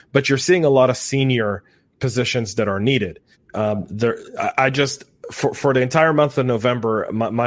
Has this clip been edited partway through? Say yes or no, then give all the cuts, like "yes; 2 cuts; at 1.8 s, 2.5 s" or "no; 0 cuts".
yes; 1 cut; at 3.3 s